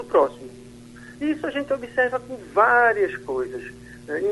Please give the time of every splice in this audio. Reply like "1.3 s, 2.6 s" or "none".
1.2 s